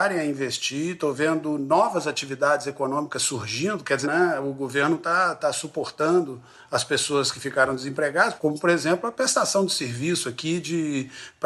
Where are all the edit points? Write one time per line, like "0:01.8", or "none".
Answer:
0:04.0
0:08.4